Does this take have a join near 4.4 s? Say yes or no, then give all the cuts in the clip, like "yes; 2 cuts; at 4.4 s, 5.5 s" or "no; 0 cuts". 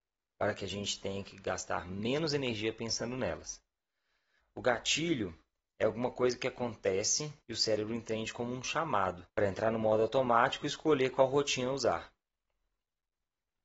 yes; 3 cuts; at 4.4 s, 7.4 s, 9.3 s